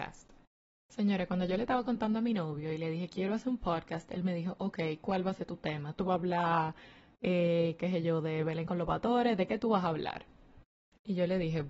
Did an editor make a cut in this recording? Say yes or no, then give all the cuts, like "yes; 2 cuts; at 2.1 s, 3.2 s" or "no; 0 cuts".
yes; 1 cut; at 6.0 s